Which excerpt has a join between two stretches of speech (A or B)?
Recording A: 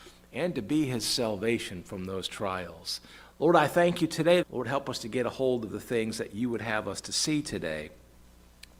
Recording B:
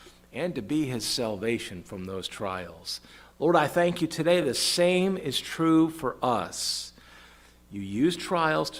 A